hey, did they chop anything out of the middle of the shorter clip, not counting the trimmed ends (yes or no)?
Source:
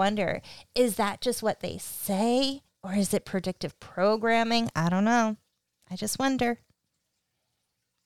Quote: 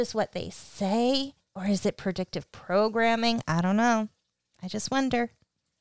no